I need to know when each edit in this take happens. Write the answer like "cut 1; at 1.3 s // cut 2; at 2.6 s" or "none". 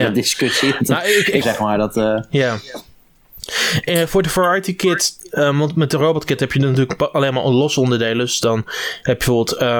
cut 1; at 1.4 s